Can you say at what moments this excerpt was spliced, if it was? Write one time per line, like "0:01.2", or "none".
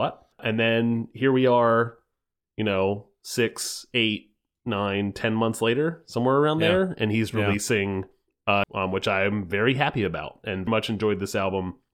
0:08.6
0:10.7